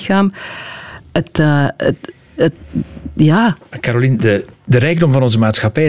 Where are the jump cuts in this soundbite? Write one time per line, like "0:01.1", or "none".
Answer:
0:04.5